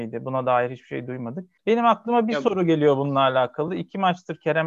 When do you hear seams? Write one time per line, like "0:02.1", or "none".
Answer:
none